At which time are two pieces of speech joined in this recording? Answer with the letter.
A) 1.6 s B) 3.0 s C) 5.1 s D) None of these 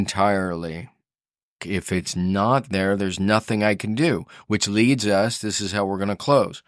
A